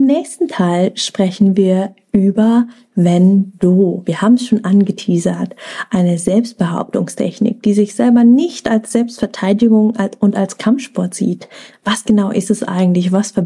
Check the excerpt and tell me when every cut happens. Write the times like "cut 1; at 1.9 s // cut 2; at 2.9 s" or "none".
none